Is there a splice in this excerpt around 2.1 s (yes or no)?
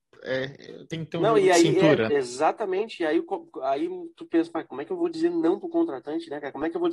yes